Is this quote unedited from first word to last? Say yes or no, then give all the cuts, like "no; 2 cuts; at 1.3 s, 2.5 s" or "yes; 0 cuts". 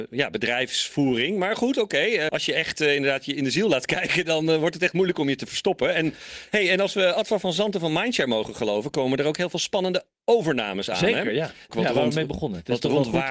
no; 2 cuts; at 2.3 s, 11.7 s